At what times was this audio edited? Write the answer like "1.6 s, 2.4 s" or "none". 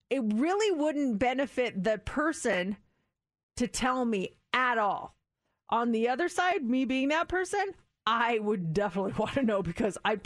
none